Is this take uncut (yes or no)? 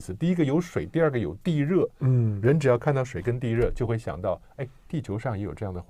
yes